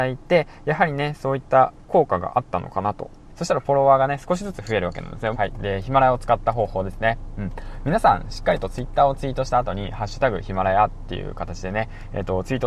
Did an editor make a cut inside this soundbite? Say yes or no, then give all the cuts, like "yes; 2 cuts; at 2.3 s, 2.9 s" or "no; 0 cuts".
yes; 2 cuts; at 3.3 s, 5.3 s